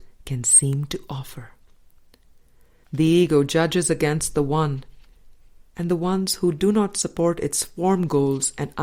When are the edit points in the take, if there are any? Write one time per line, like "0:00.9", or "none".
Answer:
0:02.8